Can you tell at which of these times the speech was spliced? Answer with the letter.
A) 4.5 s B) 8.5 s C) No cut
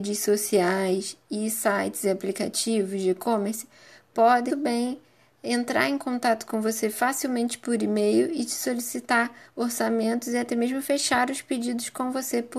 A